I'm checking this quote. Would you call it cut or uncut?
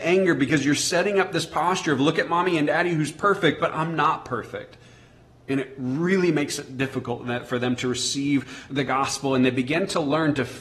cut